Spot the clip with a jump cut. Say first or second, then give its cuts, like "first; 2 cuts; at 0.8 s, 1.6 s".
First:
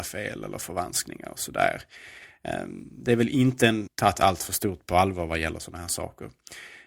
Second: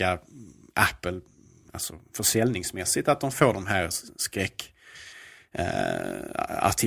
first; 1 cut; at 3.9 s